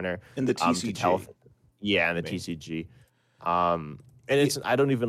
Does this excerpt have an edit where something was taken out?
no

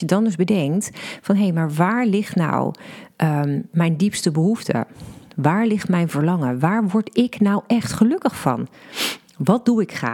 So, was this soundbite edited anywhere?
no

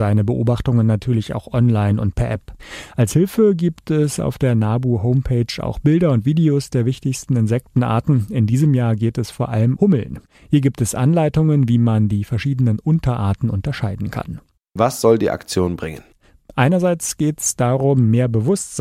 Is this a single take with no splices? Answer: no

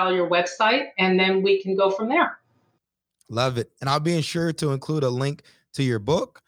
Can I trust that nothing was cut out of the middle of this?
yes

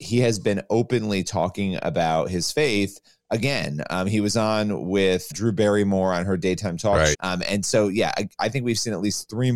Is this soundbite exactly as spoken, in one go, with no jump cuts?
no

